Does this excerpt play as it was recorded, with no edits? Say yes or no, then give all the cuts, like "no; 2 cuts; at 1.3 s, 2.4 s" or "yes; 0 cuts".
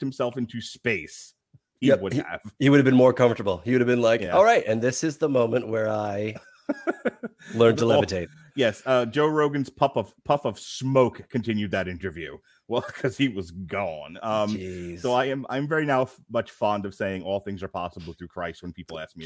yes; 0 cuts